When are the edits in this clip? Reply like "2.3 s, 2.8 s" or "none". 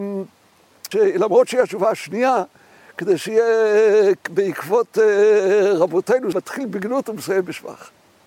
0.9 s, 6.3 s